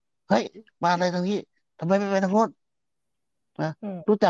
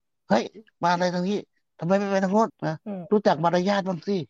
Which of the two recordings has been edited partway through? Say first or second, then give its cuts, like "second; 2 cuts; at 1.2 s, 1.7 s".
second; 1 cut; at 2.5 s